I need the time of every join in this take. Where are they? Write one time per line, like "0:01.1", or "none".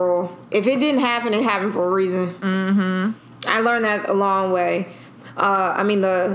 none